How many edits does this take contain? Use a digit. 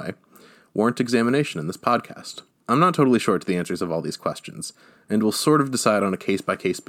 1